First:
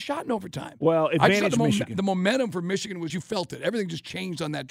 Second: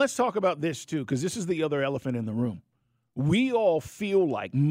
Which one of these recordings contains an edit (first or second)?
first